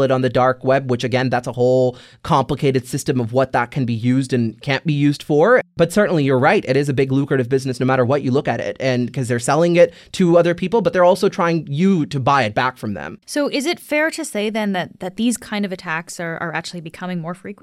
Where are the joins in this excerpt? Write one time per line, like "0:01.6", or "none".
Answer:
0:13.2